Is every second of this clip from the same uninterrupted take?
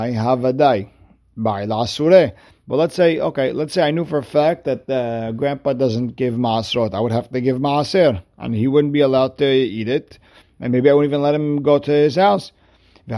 yes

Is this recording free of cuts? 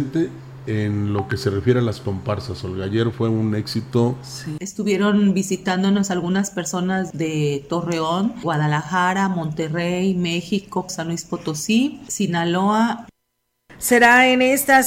no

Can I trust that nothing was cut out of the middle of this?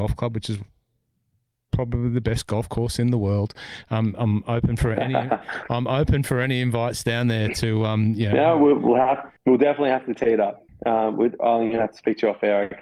no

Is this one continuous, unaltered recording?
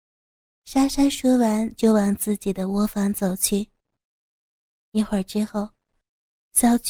yes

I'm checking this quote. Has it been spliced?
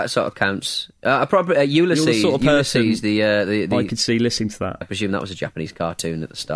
yes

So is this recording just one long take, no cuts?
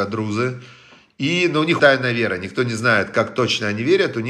no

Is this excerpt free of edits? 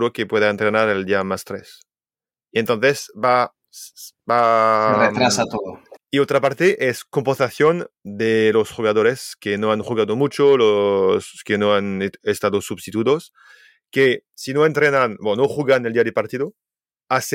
no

